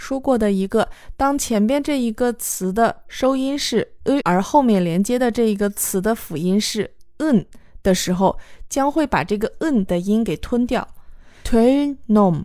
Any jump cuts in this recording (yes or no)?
yes